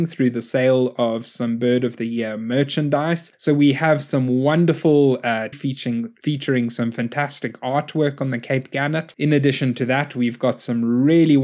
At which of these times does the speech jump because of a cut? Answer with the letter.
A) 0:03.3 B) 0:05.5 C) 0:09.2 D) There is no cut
B